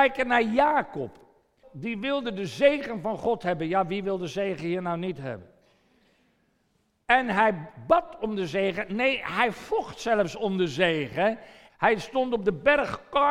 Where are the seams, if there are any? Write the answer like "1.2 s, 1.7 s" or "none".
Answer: 1.6 s, 11.7 s